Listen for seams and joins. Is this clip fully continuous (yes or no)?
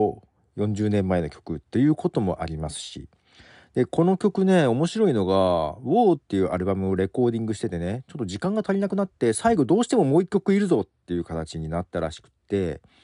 yes